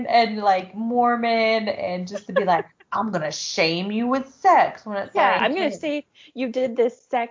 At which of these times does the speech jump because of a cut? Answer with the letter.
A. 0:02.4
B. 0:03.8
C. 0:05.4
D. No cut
C